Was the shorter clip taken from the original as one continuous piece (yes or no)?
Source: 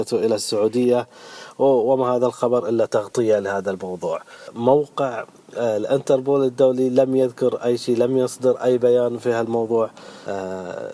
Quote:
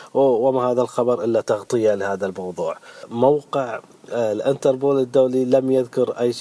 yes